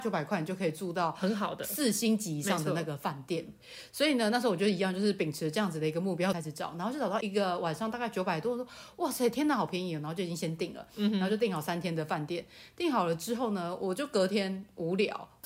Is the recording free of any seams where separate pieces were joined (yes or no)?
yes